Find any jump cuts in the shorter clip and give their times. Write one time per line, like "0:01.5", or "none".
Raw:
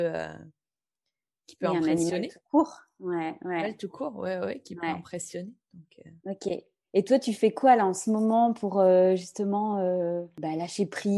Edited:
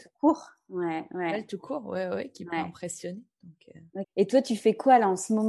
0:04.0